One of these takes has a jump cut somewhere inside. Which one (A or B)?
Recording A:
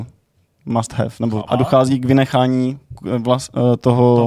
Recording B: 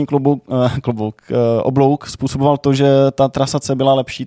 A